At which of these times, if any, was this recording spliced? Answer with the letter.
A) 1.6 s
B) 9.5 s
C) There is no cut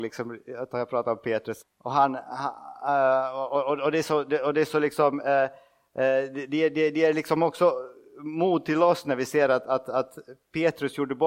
A